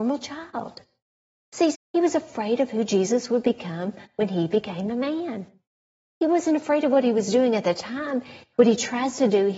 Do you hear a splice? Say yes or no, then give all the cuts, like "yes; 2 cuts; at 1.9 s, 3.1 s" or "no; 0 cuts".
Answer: yes; 2 cuts; at 1.7 s, 8.5 s